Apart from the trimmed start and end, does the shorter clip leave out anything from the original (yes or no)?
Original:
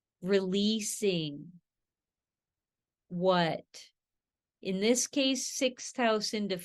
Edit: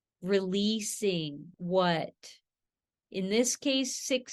yes